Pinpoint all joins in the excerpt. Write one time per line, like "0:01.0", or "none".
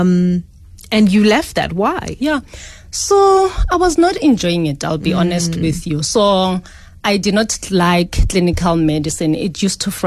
none